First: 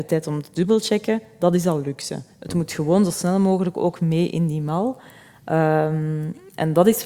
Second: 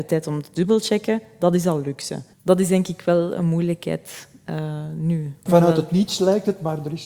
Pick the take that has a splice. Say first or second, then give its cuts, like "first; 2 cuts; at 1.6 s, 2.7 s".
second; 2 cuts; at 2.3 s, 5.5 s